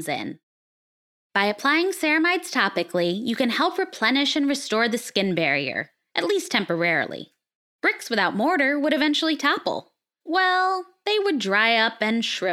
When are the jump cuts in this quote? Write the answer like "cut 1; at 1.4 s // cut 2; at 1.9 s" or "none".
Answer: cut 1; at 7.8 s // cut 2; at 10.2 s